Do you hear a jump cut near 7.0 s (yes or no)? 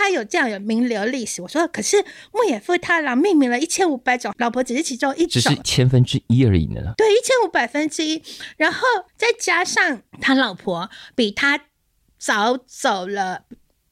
no